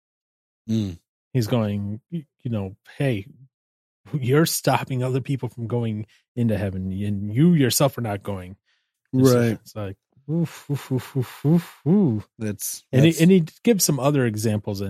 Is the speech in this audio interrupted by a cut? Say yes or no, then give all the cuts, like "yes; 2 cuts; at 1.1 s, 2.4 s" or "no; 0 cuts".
no; 0 cuts